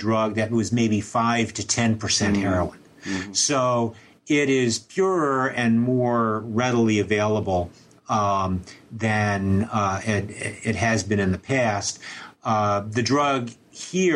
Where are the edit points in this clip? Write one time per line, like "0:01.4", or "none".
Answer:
none